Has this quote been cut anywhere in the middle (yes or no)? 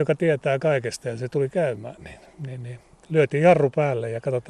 no